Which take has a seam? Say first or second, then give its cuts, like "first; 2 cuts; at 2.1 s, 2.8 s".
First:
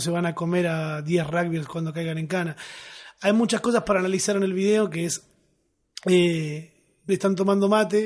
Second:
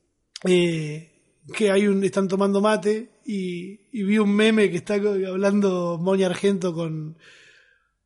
first; 1 cut; at 7.1 s